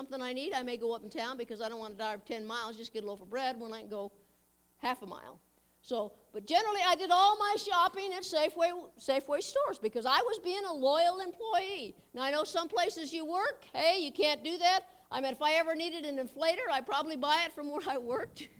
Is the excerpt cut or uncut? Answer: uncut